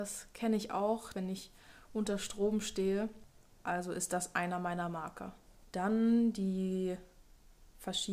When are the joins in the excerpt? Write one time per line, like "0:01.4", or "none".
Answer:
0:01.1
0:05.6